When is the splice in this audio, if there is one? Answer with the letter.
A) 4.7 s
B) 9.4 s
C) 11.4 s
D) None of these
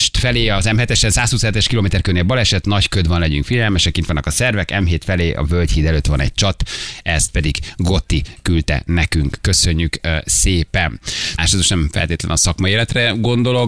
C